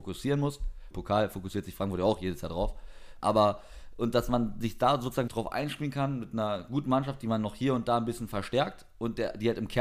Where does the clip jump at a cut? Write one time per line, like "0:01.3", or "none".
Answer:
0:00.9
0:03.2
0:05.3